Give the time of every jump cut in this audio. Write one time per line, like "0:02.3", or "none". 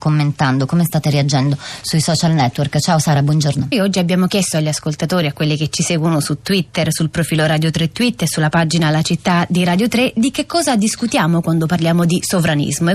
0:03.7